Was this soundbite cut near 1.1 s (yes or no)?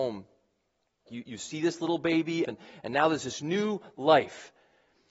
yes